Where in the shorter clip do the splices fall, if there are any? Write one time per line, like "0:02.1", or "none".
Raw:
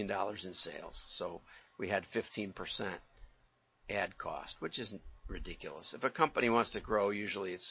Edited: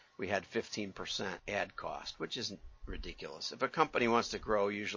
0:01.4